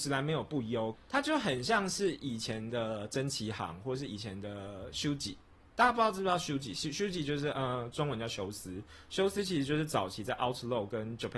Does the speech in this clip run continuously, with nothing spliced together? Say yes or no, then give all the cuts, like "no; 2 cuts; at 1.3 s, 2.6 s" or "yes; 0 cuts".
no; 1 cut; at 0.9 s